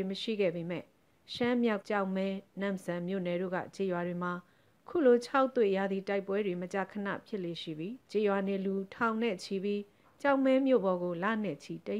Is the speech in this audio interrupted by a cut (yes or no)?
yes